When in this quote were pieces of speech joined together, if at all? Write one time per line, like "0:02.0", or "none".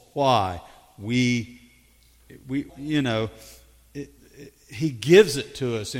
0:02.7
0:04.2